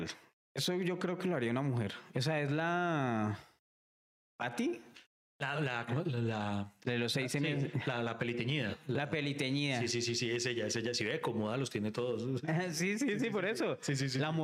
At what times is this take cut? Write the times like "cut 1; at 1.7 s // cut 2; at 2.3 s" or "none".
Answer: cut 1; at 2.1 s // cut 2; at 5.5 s